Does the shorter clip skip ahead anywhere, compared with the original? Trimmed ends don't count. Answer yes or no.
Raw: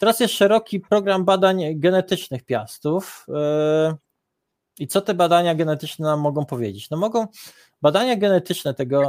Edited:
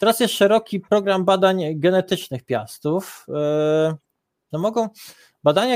yes